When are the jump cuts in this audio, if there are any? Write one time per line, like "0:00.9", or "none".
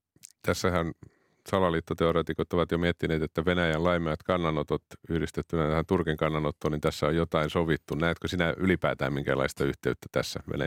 none